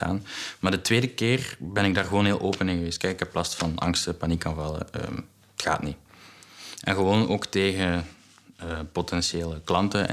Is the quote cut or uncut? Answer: uncut